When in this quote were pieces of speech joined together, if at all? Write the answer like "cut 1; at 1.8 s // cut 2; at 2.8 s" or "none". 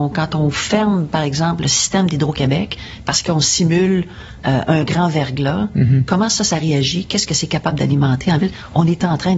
none

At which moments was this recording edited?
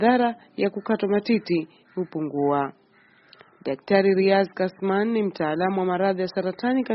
none

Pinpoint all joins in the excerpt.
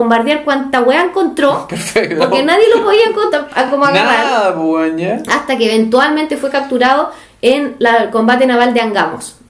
none

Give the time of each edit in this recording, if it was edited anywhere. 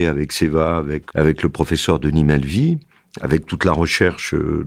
cut 1; at 1.1 s

